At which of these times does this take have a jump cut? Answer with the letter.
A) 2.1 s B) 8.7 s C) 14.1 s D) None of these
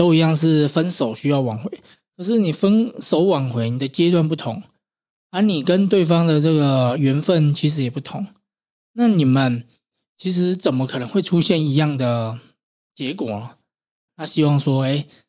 C